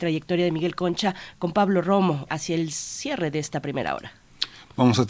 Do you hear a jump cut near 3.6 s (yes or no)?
no